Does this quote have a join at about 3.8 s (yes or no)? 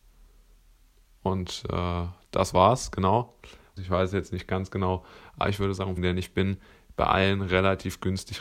yes